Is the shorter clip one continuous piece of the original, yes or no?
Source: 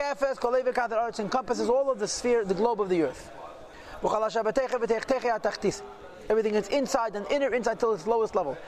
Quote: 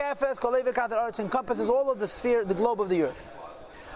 yes